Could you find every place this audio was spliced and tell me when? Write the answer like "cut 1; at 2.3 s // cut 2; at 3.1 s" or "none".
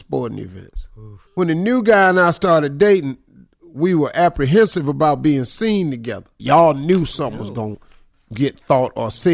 cut 1; at 1.3 s // cut 2; at 6.4 s